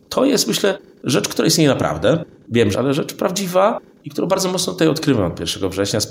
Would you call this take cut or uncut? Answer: cut